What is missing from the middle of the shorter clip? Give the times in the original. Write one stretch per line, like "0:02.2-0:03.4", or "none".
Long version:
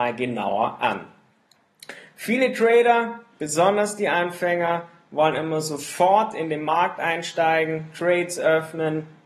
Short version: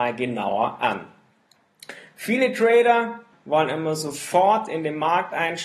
0:03.3-0:05.0